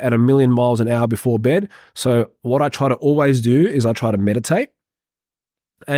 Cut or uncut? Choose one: uncut